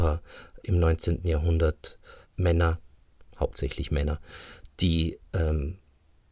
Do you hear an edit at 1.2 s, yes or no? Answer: no